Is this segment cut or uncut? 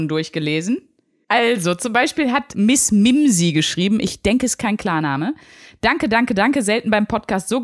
uncut